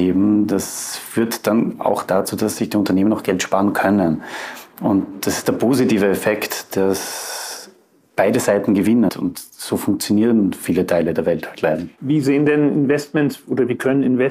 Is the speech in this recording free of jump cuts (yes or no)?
no